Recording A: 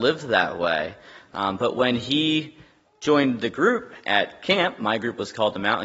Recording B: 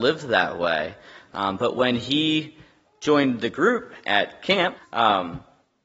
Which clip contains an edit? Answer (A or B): B